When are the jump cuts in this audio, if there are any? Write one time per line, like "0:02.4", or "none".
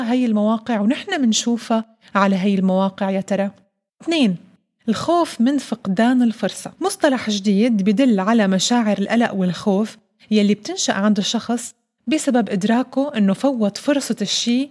0:03.9
0:06.7

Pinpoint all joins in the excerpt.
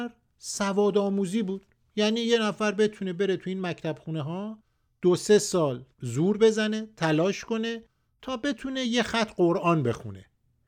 0:05.9

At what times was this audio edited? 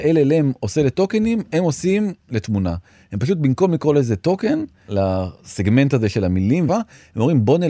0:06.7

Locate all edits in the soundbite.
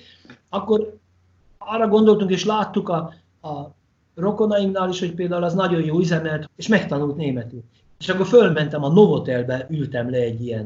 0:06.5
0:07.8

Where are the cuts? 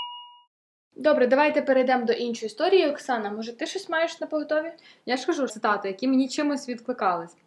0:05.5

